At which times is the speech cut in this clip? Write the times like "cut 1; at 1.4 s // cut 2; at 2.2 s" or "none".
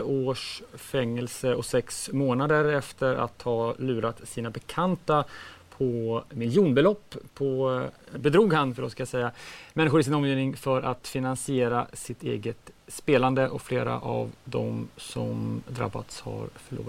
cut 1; at 8.2 s